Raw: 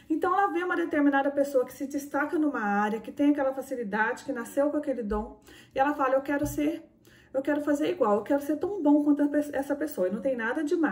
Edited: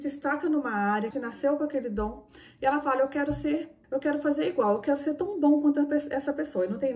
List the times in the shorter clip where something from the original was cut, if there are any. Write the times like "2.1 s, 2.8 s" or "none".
1.1 s, 3.8 s